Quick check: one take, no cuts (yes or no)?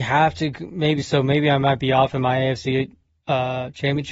yes